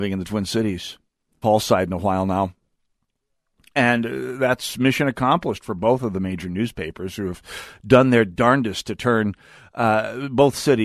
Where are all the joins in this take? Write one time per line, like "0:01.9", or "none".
0:01.4